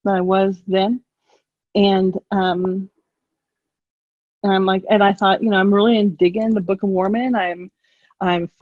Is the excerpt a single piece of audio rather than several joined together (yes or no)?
yes